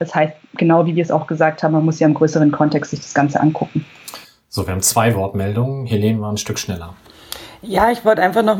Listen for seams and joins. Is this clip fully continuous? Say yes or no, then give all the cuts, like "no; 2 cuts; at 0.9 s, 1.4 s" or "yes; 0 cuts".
yes; 0 cuts